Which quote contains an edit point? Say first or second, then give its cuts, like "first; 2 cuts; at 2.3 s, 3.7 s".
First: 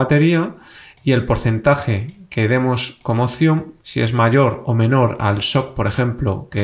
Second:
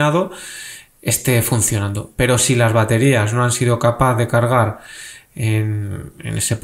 first; 1 cut; at 3.8 s